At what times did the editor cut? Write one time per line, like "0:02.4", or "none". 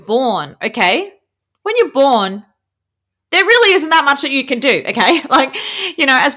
none